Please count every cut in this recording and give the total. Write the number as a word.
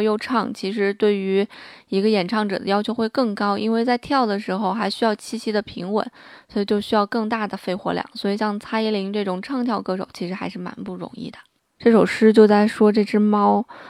one